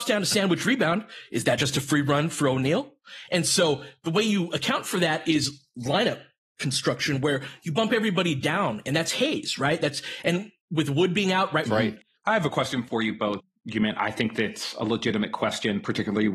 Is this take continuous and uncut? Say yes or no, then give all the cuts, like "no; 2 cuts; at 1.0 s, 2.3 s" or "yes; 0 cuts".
no; 2 cuts; at 11.7 s, 13.4 s